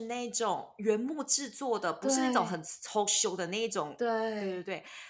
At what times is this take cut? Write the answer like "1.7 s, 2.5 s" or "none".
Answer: none